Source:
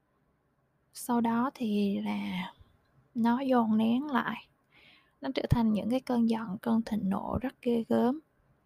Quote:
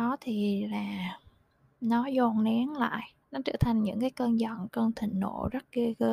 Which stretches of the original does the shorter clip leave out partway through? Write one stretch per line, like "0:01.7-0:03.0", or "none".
0:04.6-0:05.1